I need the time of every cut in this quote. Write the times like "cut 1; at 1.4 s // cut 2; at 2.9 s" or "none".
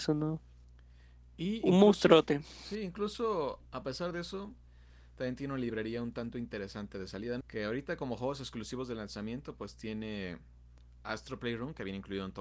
cut 1; at 7.4 s